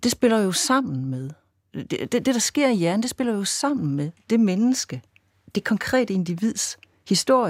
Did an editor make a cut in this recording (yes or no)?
no